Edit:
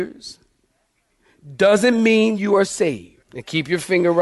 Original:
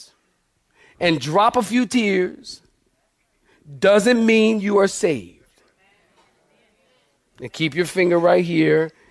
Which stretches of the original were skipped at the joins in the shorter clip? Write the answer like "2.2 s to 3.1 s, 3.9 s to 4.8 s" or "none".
5.5 s to 7.3 s

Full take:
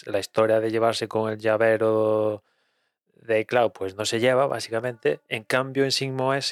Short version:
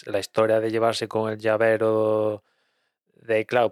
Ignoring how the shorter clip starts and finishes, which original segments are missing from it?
none

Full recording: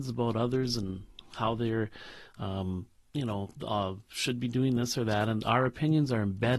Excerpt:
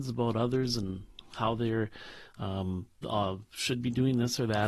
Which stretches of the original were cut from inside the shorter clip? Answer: 3.0 s to 3.6 s

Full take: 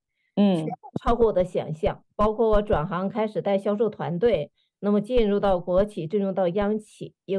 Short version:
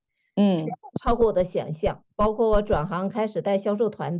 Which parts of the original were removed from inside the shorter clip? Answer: none

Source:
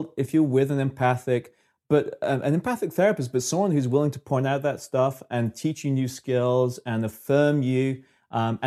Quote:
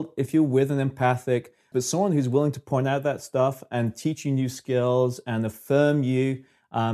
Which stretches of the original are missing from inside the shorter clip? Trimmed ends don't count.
1.7 s to 3.3 s

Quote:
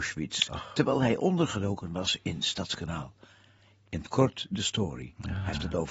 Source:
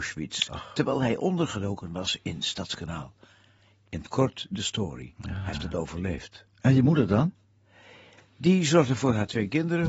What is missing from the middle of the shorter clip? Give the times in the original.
none

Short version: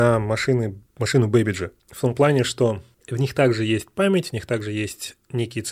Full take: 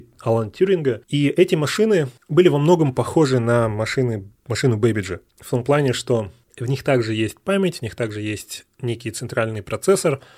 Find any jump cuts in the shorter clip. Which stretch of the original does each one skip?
none

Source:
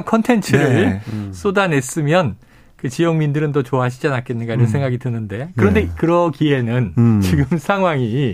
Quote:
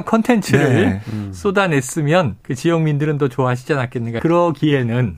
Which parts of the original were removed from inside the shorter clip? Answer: 2.4 s to 2.7 s, 4.5 s to 6.0 s

